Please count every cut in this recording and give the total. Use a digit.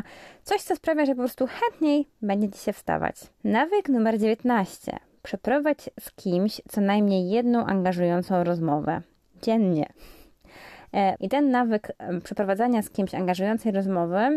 2